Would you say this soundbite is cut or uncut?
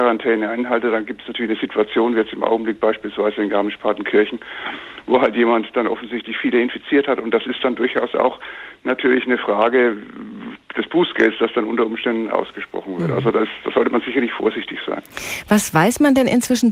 uncut